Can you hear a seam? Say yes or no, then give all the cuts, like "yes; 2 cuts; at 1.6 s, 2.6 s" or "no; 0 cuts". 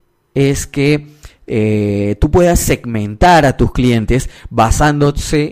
no; 0 cuts